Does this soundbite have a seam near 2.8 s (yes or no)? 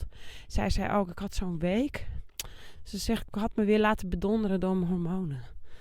no